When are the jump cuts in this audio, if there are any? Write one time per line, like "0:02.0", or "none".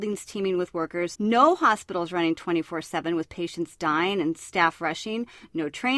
0:01.1